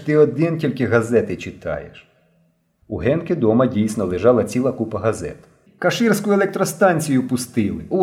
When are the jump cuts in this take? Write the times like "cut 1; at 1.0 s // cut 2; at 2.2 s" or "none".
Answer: cut 1; at 5.7 s